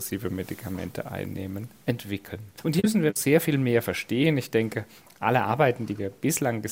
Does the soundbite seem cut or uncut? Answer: uncut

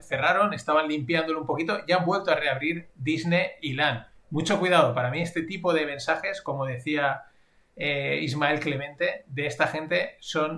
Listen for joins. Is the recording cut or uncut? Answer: uncut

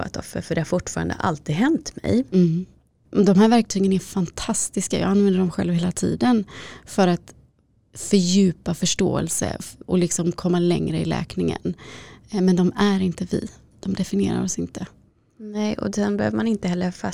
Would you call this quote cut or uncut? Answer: cut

